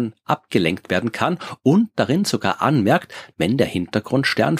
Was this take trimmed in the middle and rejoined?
yes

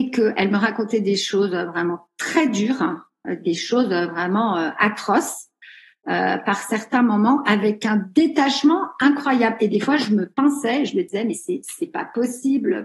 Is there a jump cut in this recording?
no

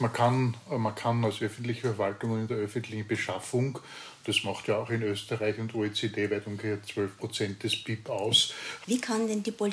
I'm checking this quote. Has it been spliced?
yes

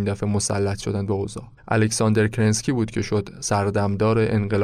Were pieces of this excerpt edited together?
yes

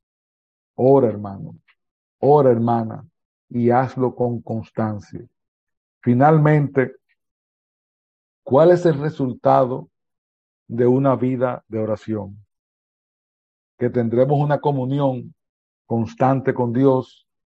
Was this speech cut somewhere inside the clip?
no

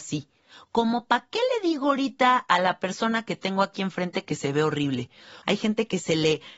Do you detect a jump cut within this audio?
yes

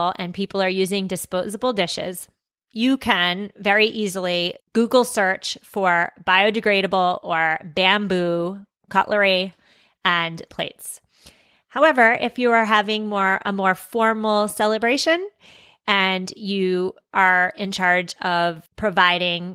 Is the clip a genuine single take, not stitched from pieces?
yes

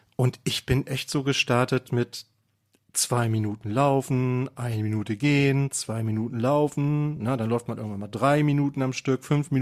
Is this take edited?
no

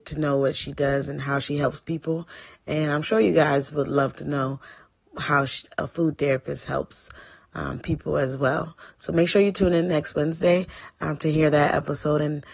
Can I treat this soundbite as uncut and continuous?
yes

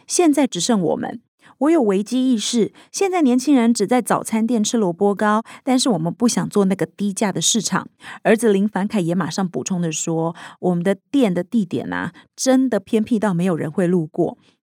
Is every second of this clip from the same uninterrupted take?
yes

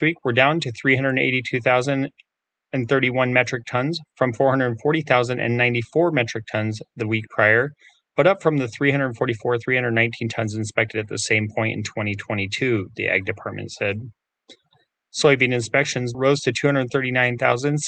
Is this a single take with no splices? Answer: no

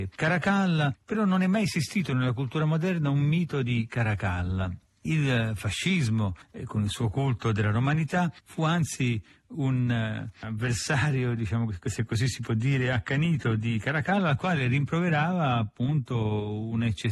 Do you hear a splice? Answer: no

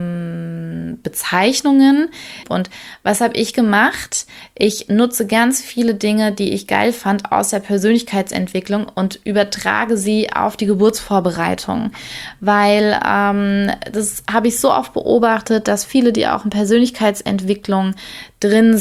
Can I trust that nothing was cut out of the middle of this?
no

